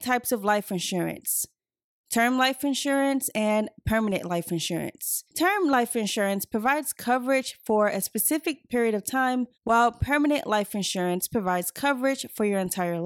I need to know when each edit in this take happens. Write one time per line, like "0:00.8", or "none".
0:05.3
0:09.5